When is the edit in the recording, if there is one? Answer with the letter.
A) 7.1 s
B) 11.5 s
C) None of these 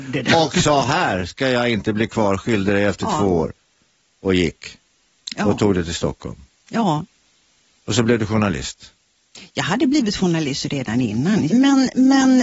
B